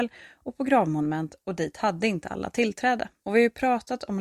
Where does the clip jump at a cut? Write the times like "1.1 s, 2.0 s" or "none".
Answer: 3.2 s